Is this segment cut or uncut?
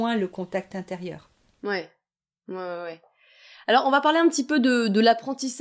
uncut